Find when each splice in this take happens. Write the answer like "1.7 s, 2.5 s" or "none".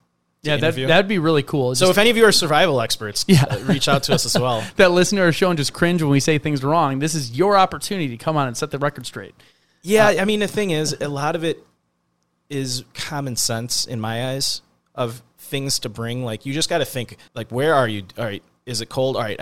17.3 s